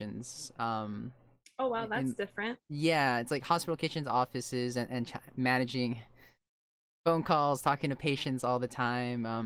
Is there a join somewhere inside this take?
no; 0 cuts

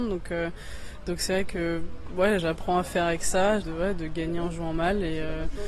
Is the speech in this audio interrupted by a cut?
yes; 2 cuts; at 2.4 s, 3.6 s

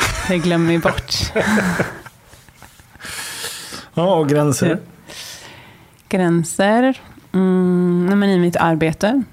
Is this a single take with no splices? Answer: yes; 0 cuts

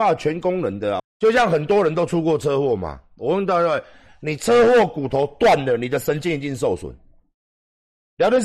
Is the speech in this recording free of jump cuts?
no; 1 cut; at 1.0 s

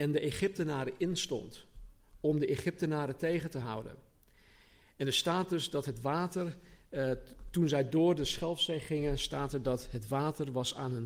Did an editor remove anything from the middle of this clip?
no; 0 cuts

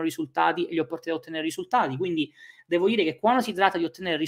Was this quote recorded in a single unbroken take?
yes; 0 cuts

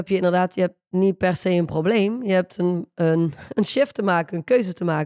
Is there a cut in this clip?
no; 0 cuts

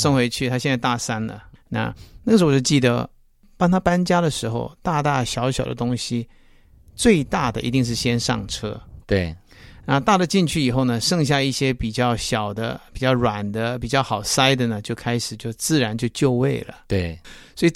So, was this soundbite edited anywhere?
no; 0 cuts

